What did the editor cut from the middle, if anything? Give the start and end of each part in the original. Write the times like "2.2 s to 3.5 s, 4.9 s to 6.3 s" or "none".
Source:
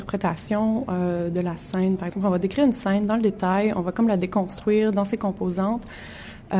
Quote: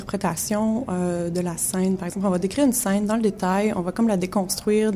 none